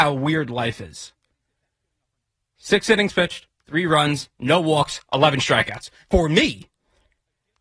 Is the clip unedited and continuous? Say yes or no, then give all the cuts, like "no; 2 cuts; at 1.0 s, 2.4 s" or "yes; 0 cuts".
no; 2 cuts; at 3.5 s, 6.0 s